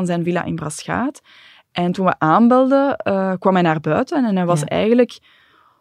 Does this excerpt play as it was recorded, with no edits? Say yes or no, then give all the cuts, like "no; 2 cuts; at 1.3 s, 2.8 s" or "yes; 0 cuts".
yes; 0 cuts